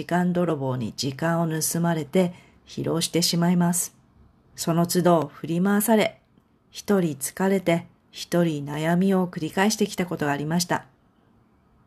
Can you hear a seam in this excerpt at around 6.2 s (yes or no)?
no